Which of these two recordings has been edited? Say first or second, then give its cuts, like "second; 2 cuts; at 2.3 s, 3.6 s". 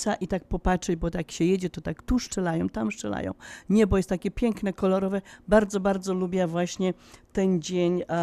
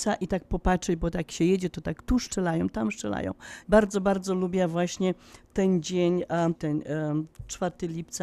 second; 2 cuts; at 3.6 s, 6.6 s